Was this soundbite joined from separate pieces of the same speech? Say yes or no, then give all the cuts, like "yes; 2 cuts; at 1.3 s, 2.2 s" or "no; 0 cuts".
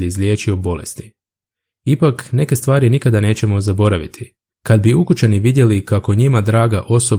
yes; 1 cut; at 4.5 s